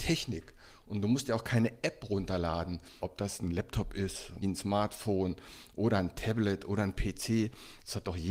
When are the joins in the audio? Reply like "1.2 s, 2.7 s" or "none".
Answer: 3.0 s, 4.4 s